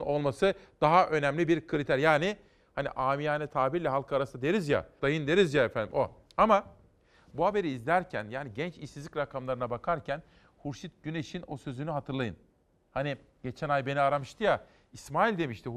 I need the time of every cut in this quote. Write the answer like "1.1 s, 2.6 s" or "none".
5.0 s